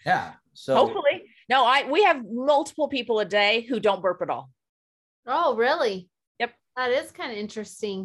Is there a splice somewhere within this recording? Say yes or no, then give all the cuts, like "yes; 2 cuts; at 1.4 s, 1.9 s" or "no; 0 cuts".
no; 0 cuts